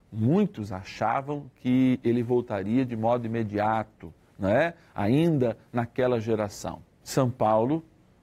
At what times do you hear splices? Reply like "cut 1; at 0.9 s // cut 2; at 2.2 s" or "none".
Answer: cut 1; at 7.0 s